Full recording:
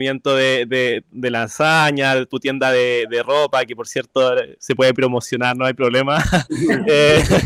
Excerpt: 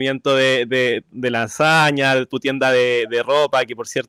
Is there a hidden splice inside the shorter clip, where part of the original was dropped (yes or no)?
no